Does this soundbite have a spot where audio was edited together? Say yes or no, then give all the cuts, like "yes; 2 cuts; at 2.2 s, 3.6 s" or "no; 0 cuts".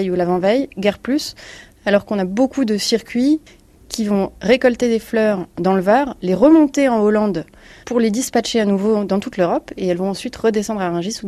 no; 0 cuts